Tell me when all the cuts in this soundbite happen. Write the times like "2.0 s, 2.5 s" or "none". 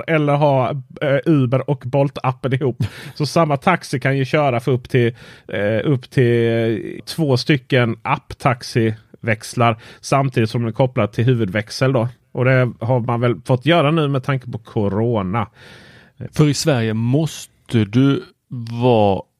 7.0 s, 16.3 s